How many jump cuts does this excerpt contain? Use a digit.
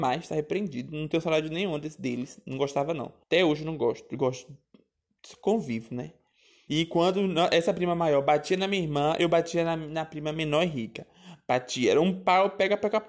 2